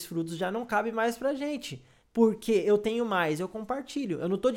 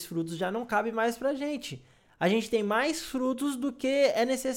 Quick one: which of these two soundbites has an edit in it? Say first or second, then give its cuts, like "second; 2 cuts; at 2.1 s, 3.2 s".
first; 1 cut; at 2.0 s